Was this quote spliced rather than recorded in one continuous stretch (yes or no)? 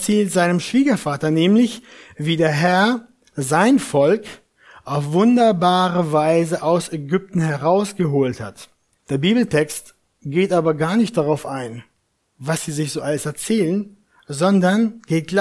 yes